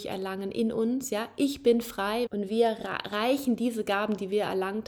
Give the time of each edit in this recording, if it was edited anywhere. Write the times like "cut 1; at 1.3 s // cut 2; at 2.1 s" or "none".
cut 1; at 2.3 s

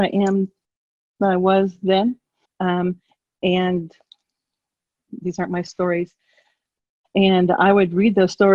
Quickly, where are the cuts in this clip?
cut 1; at 2.4 s // cut 2; at 7.0 s

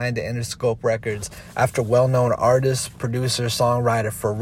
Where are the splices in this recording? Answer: none

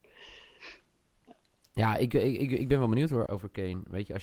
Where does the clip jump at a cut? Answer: cut 1; at 3.3 s

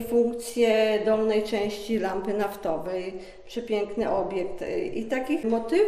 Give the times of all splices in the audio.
none

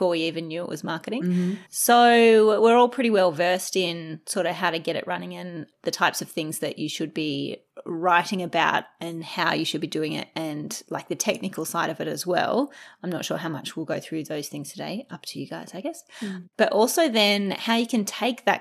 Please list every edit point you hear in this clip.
cut 1; at 1.7 s

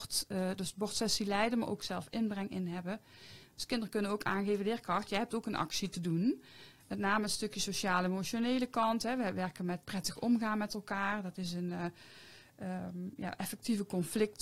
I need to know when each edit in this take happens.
cut 1; at 3.4 s // cut 2; at 6.8 s

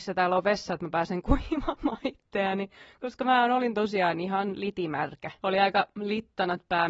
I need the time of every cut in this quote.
cut 1; at 5.4 s

